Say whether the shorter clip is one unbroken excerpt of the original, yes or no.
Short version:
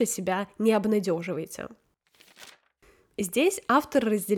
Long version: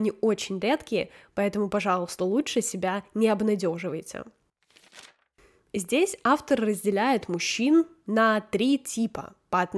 yes